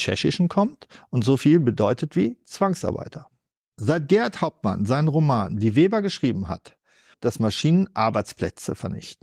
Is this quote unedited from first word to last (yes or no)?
no